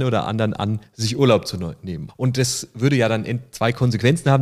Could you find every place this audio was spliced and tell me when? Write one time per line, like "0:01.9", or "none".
0:02.1